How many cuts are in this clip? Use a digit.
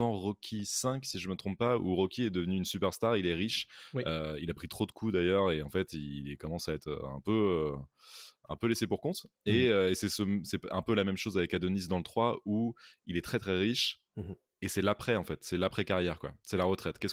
0